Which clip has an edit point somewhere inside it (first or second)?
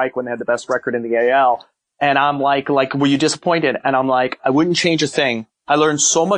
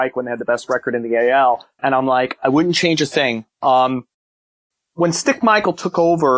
second